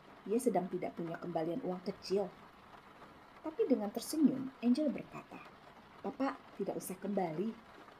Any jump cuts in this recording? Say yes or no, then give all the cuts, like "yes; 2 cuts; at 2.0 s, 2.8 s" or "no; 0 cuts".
yes; 1 cut; at 6.0 s